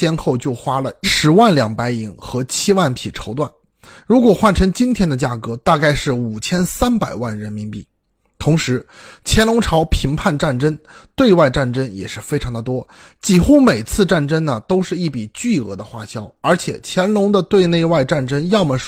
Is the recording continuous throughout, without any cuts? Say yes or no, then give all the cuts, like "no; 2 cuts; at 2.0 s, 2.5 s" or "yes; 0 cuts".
yes; 0 cuts